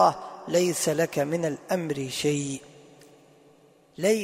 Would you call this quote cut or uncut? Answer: uncut